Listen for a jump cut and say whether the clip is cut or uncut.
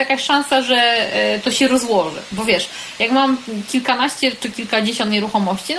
uncut